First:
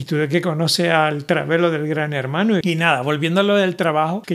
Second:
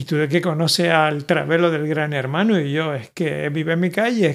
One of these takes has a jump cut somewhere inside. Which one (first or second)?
first